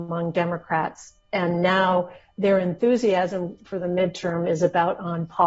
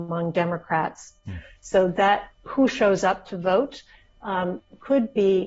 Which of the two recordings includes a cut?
second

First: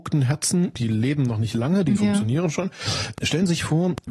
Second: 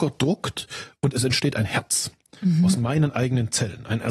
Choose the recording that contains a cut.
first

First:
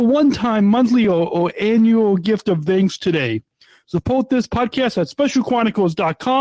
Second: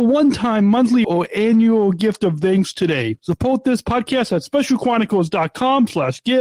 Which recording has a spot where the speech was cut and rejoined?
second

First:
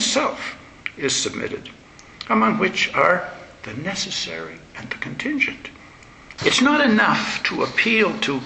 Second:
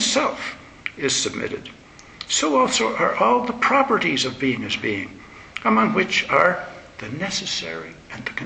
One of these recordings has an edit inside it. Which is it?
first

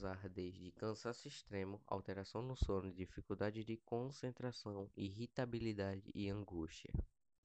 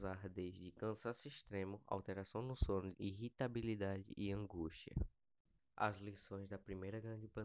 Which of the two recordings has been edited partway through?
second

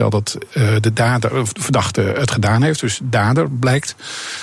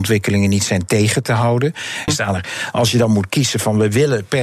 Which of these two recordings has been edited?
second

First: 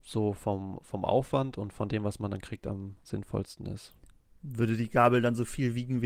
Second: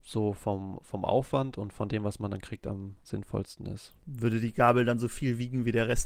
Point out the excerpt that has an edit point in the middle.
second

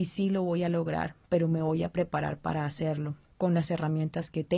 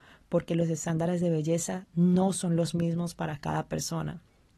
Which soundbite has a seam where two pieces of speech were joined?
first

